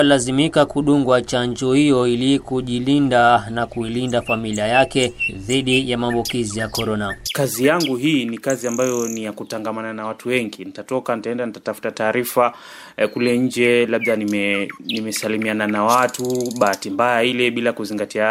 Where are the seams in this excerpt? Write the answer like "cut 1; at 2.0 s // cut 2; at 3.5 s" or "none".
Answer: none

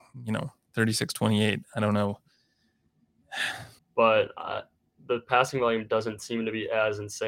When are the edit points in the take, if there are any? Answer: cut 1; at 3.8 s

